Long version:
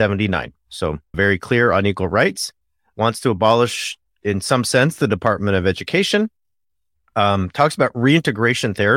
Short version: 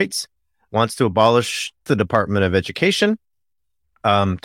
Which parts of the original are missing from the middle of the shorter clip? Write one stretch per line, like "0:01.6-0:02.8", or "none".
0:04.1-0:05.0